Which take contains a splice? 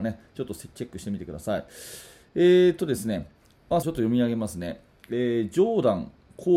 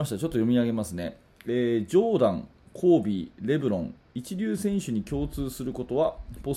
first; 2 cuts; at 2.3 s, 3.8 s

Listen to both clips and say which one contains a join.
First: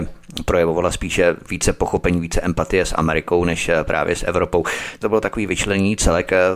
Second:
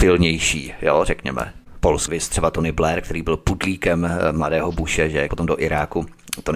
second; 2 cuts; at 2.1 s, 5.3 s

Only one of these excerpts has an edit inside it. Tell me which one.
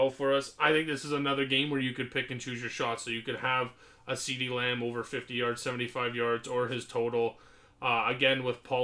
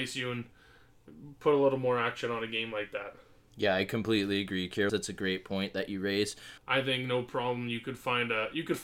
second; 2 cuts; at 4.9 s, 6.6 s

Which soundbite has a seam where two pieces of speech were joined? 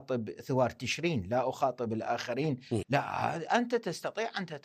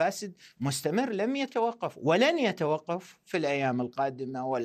first; 1 cut; at 2.8 s

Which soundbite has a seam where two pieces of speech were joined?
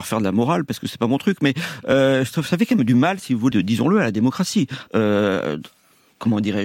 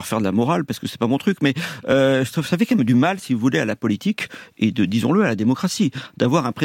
first; 2 cuts; at 3.5 s, 4.9 s

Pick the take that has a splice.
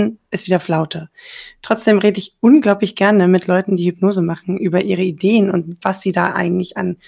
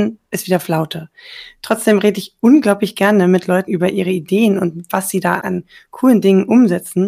second; 2 cuts; at 3.7 s, 5.4 s

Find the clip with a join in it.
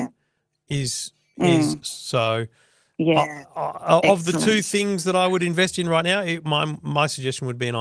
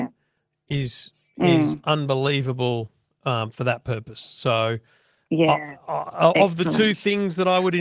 first; 1 cut; at 1.8 s

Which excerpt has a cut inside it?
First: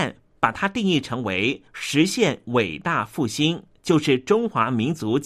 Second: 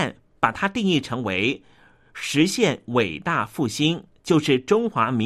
first; 1 cut; at 1.7 s

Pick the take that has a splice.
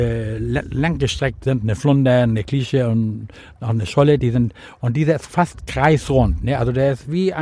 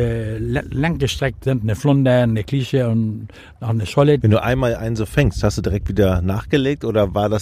second; 1 cut; at 4.2 s

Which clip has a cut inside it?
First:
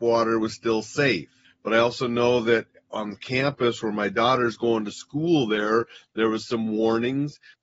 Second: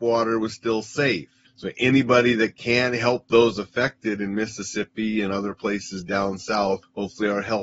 second; 1 cut; at 1.5 s

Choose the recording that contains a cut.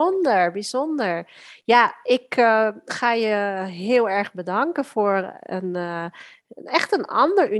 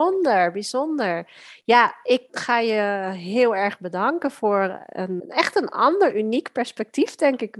second; 2 cuts; at 2.3 s, 5.2 s

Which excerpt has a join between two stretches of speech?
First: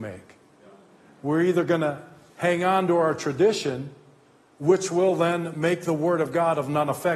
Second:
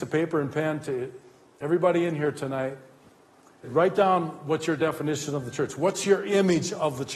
second; 1 cut; at 3.6 s

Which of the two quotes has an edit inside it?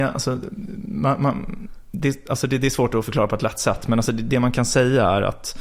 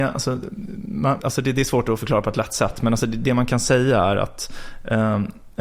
second; 1 cut; at 1.2 s

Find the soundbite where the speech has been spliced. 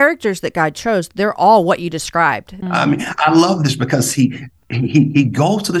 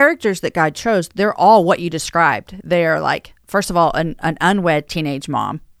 first; 1 cut; at 2.6 s

